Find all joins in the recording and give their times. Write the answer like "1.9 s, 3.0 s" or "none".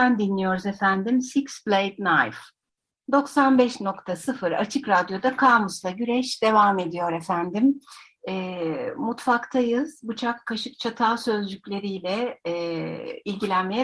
none